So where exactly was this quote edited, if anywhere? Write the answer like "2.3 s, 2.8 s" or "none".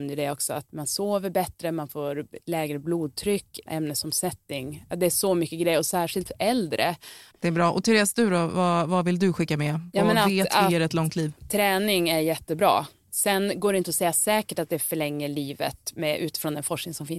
3.7 s, 7.3 s